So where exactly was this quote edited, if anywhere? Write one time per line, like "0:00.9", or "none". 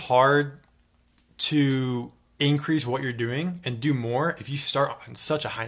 none